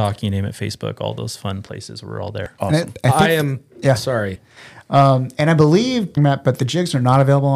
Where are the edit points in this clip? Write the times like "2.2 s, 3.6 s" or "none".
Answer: 4.4 s, 6.2 s